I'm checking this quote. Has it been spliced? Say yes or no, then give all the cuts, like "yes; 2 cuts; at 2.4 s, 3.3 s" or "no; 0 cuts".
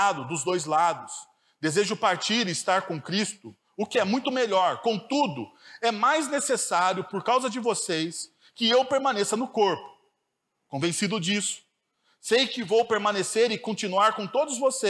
no; 0 cuts